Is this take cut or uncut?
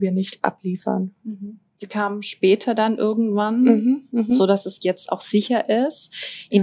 uncut